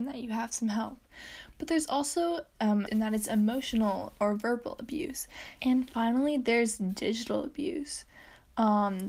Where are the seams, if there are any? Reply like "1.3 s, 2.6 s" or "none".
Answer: 2.9 s, 5.6 s